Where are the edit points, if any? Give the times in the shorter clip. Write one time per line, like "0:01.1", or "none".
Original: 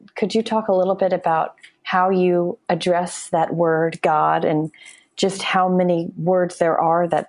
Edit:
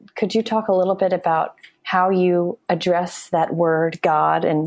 none